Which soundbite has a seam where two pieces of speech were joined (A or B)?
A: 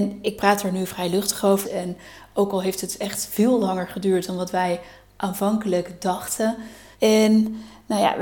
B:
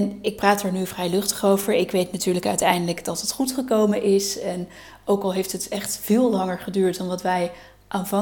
A